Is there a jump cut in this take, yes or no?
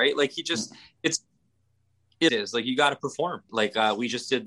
yes